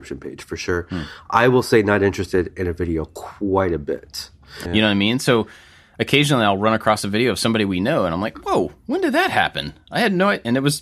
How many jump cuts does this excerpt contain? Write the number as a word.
one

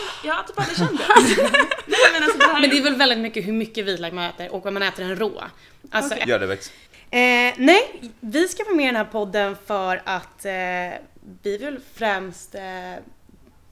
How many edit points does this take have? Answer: one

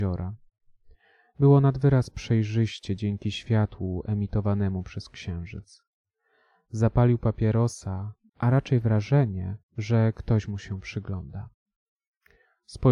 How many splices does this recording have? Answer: two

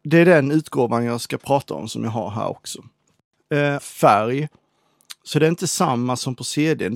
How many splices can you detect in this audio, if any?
one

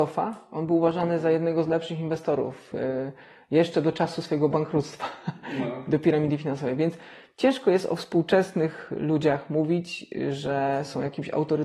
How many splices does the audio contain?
zero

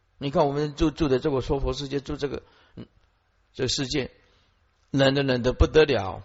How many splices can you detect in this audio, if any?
zero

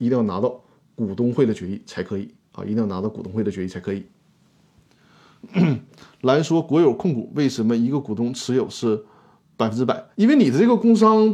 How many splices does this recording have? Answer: one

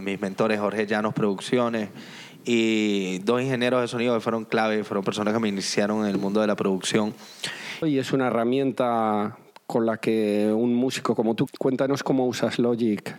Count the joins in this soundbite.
two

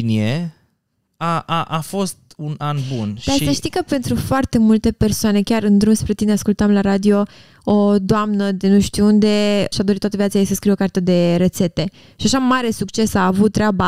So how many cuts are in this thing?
two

